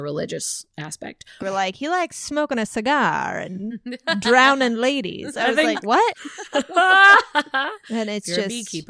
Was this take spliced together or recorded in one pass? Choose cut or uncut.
cut